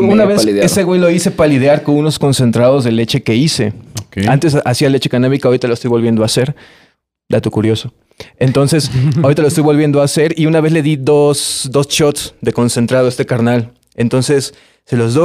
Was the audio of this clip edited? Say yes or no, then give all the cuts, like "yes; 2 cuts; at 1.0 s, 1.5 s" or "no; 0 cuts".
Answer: no; 0 cuts